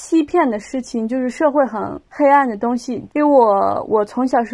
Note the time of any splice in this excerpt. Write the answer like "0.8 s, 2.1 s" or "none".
2.1 s, 3.1 s